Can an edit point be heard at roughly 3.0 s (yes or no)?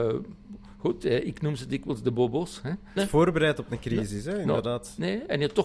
yes